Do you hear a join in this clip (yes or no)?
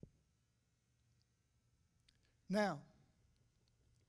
no